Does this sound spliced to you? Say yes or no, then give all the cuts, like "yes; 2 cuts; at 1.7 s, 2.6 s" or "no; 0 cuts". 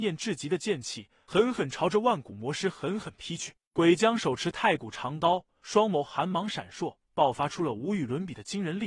yes; 1 cut; at 5.5 s